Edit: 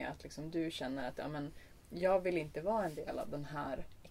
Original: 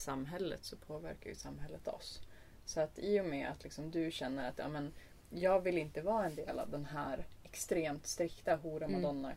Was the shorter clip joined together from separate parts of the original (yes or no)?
no